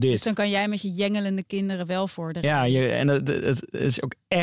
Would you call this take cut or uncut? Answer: uncut